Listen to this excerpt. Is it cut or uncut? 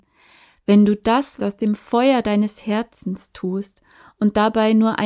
cut